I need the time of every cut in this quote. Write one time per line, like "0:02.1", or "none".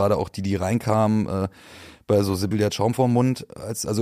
0:02.5